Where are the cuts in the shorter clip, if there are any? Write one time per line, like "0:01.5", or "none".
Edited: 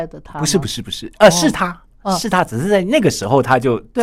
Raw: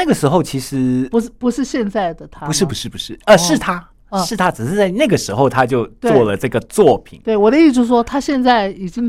none